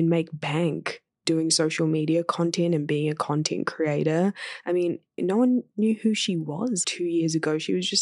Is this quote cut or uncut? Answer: cut